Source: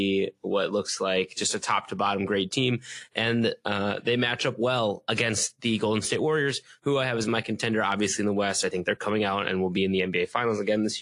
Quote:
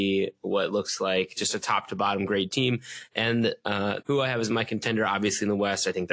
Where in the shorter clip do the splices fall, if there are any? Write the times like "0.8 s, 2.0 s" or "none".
4.0 s